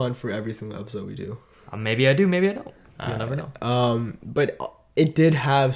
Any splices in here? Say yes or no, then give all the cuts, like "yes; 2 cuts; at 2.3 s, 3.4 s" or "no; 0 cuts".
no; 0 cuts